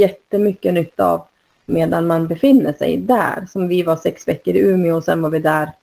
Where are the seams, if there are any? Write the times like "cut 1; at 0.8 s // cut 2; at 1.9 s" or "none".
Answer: none